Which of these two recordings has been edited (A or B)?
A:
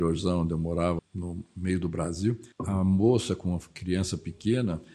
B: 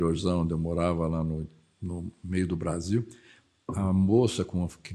A